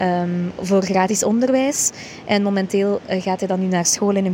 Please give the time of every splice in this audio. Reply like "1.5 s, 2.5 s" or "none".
none